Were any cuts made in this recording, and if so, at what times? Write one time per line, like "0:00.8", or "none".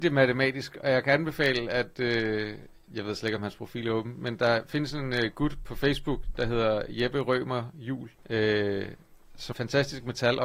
0:08.2
0:09.5